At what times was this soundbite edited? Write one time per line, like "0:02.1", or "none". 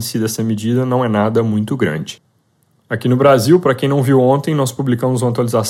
none